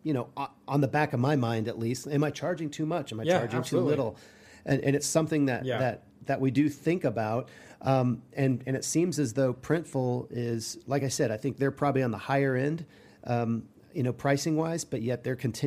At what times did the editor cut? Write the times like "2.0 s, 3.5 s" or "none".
none